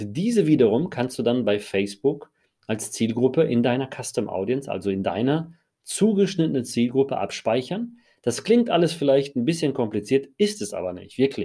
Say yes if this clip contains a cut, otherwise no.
no